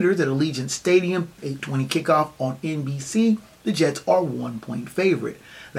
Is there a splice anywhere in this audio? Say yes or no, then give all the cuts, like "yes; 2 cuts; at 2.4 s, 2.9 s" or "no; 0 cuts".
yes; 1 cut; at 1.4 s